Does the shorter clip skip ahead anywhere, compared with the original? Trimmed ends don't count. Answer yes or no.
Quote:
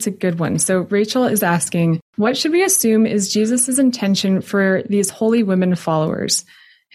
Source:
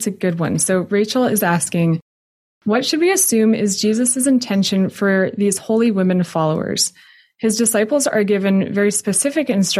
yes